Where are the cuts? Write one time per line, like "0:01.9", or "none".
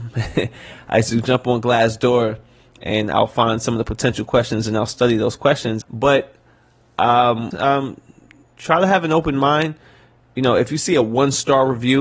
0:05.8
0:07.5